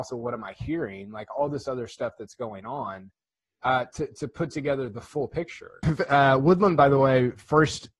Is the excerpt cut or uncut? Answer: cut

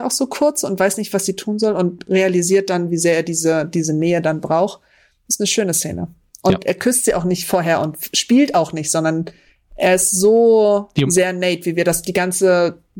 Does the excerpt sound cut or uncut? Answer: uncut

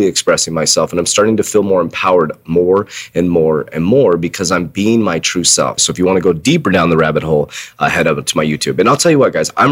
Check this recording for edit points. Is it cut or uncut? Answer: cut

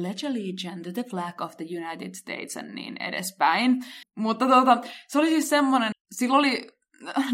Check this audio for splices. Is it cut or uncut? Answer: cut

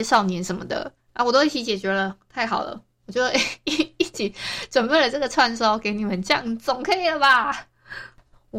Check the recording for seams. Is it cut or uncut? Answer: uncut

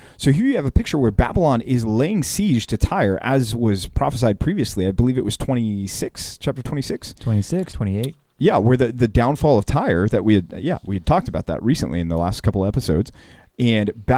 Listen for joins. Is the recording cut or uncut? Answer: cut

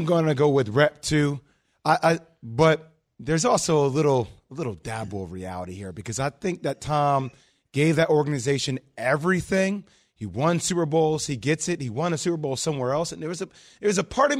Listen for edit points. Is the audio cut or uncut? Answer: uncut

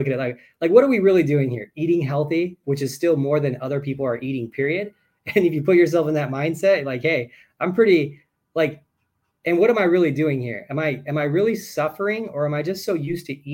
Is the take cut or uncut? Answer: cut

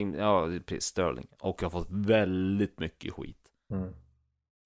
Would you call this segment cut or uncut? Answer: cut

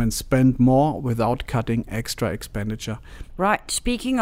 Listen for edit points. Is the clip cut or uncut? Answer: cut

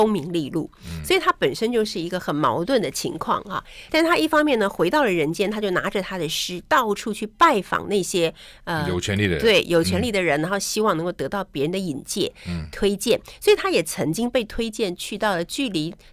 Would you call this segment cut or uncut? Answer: cut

